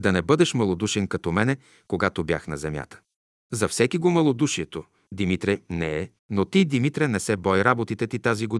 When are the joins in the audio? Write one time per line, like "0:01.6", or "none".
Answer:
0:06.2

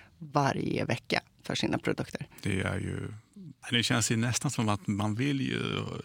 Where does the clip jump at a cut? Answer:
0:03.6

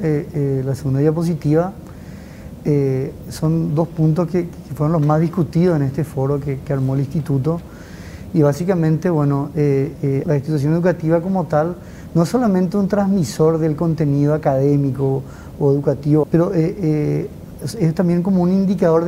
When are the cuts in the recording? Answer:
0:10.2
0:16.2

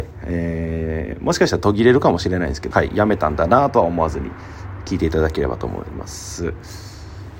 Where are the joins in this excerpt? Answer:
0:02.7

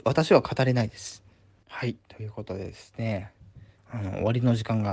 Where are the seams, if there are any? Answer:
0:01.6
0:03.8

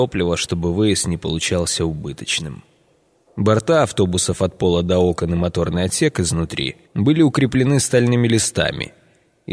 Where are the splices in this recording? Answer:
0:03.3
0:06.8

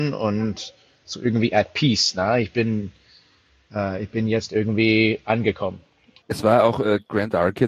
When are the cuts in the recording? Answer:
0:06.2

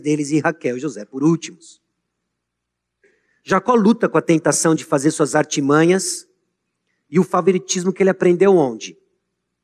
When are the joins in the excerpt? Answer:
none

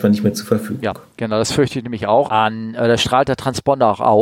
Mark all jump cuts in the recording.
0:02.3

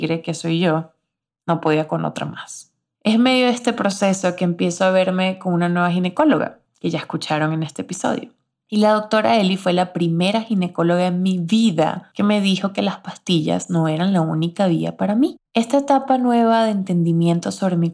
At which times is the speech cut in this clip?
0:02.9
0:06.6
0:15.4

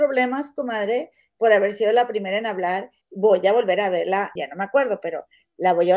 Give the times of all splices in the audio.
0:03.0
0:04.4

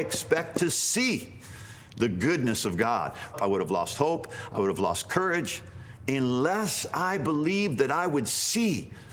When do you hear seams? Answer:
0:03.3

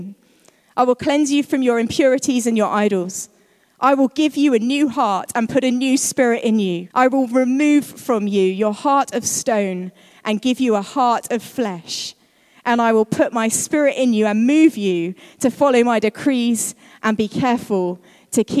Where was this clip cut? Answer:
0:06.9

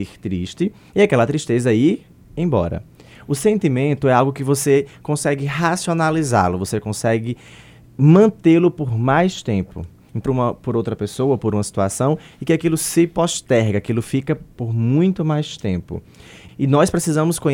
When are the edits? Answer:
0:10.3
0:16.5

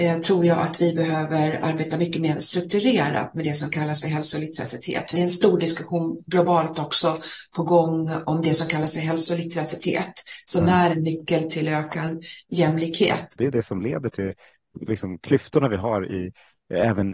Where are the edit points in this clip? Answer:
0:05.1
0:13.4

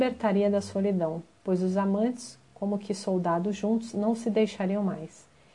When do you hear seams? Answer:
none

